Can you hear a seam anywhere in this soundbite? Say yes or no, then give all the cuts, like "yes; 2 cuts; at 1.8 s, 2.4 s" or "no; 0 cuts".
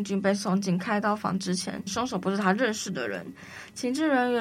yes; 1 cut; at 1.9 s